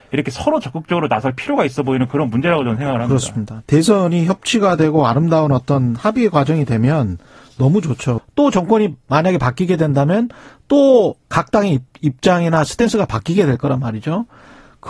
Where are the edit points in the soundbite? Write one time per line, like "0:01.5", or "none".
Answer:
0:08.2